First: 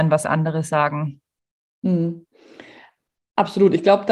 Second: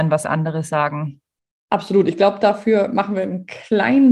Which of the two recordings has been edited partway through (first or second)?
second